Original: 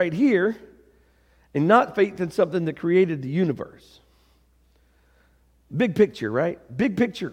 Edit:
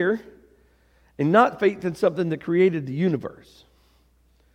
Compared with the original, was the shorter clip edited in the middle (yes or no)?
no